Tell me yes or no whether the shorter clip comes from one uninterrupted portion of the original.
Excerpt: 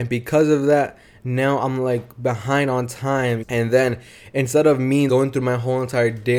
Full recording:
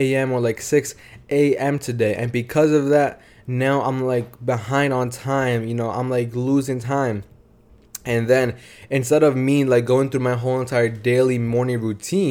no